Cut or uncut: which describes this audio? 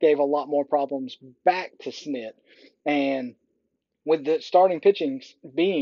uncut